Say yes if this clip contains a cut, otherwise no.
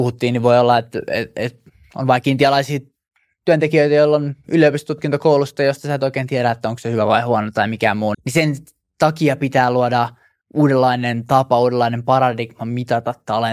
yes